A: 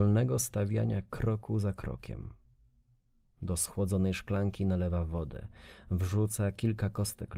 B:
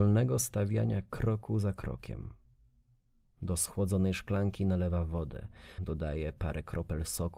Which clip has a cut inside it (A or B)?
B